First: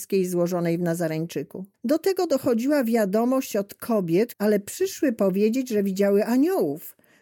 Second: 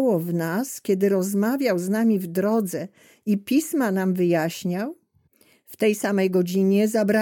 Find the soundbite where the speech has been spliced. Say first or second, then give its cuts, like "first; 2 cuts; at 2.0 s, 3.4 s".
first; 2 cuts; at 1.7 s, 4.3 s